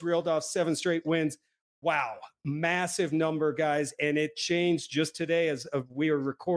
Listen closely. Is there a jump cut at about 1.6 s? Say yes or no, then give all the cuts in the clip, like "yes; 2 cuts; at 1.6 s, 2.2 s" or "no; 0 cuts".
yes; 1 cut; at 1.6 s